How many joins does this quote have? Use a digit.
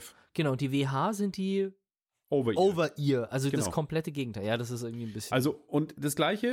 0